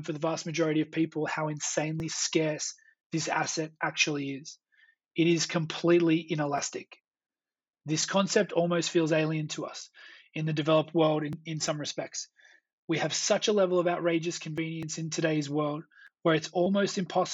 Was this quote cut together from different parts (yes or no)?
no